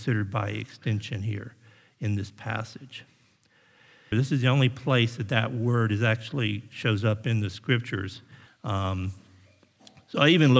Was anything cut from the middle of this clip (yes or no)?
yes